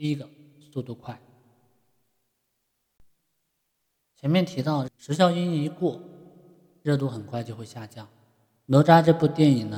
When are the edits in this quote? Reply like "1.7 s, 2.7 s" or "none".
4.9 s